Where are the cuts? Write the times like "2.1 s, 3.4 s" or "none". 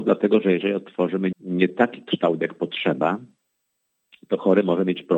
1.3 s